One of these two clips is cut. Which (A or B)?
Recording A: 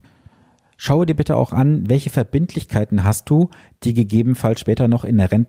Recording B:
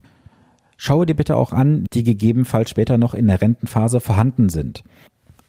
B